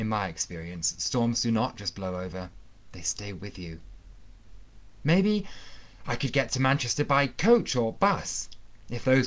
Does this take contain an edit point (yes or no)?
no